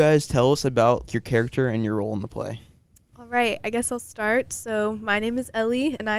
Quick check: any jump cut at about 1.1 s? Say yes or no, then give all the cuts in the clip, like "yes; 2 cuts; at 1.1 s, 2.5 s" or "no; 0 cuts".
yes; 1 cut; at 1.1 s